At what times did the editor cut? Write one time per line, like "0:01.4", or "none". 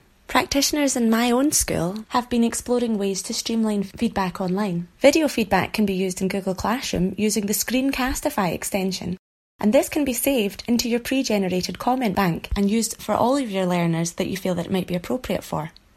0:05.0